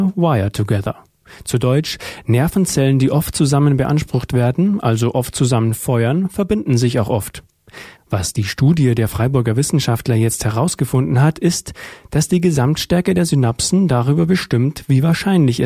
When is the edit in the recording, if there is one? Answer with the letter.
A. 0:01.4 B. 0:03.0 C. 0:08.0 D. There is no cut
C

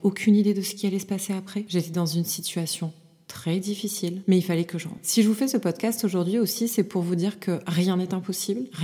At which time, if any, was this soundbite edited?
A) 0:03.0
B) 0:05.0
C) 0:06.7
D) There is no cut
D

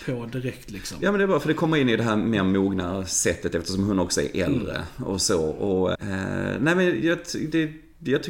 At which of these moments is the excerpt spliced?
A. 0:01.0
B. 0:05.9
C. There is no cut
B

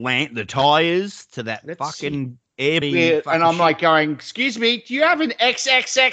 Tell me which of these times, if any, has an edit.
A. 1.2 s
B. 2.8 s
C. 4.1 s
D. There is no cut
B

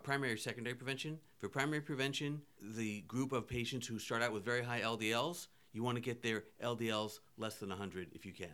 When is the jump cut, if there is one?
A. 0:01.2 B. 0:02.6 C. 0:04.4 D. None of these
B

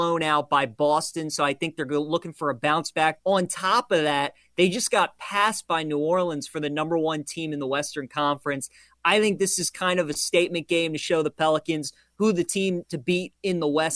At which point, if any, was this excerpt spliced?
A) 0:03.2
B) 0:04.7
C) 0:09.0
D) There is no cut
A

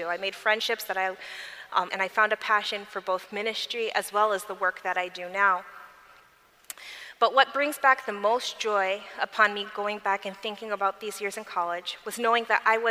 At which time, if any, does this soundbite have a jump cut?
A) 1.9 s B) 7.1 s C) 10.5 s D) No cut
A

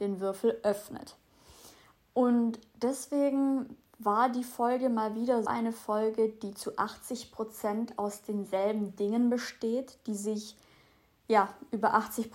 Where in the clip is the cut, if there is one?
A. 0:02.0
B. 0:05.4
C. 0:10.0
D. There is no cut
B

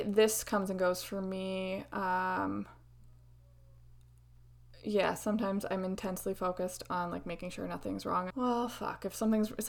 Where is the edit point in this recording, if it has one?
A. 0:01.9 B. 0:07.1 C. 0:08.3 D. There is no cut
C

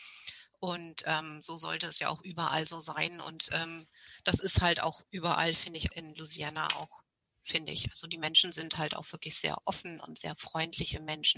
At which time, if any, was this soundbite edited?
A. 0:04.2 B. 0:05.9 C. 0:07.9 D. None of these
B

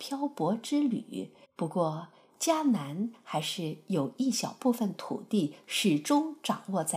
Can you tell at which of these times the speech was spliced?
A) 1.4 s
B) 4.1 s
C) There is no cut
A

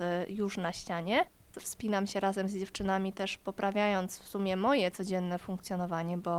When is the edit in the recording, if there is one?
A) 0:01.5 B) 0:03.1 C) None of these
A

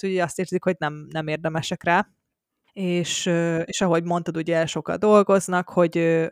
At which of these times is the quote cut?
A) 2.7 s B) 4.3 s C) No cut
A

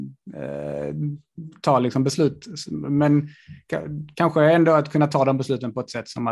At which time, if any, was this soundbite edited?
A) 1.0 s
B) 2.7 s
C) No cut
C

